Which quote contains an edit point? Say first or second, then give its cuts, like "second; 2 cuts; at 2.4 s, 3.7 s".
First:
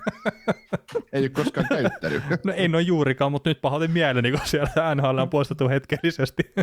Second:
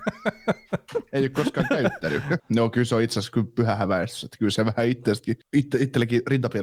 second; 2 cuts; at 2.4 s, 5.4 s